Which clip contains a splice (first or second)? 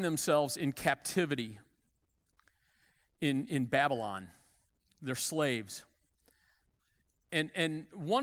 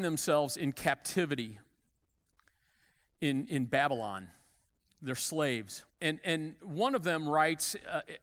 second